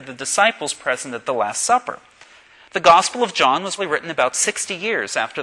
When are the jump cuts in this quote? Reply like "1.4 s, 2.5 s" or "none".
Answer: 3.8 s